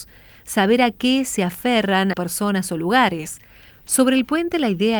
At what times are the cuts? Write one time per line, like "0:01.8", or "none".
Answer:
0:02.1
0:03.7